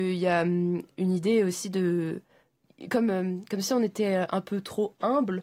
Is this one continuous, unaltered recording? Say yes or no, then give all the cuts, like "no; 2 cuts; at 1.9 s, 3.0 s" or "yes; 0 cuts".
yes; 0 cuts